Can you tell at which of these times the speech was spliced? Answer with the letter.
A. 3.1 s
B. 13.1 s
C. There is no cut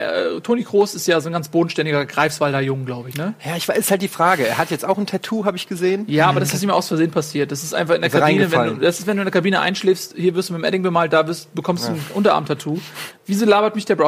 B